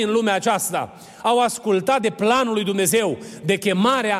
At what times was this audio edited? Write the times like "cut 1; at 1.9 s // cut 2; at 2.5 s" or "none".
none